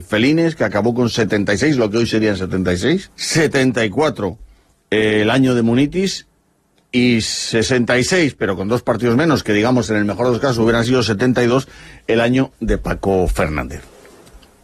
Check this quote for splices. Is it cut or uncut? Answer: cut